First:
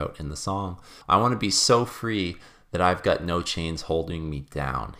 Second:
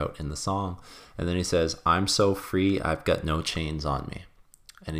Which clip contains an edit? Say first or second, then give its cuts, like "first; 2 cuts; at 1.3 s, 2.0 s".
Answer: first; 1 cut; at 1.0 s